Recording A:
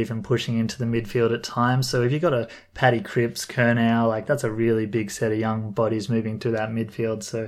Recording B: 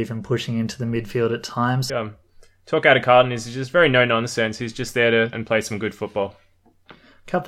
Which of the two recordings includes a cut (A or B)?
B